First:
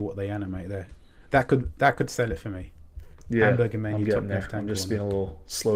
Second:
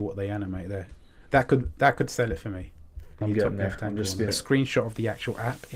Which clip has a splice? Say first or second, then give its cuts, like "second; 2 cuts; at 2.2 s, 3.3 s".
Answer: second; 2 cuts; at 3.2 s, 4.3 s